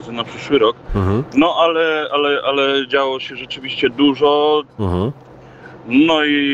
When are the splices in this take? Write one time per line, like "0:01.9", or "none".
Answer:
0:04.7